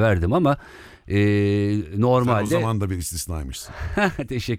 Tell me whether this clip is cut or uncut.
uncut